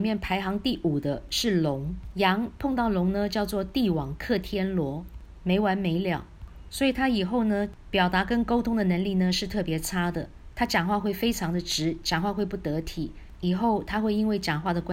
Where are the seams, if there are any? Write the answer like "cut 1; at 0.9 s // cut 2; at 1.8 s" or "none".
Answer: none